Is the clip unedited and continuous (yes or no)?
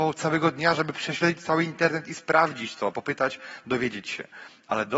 no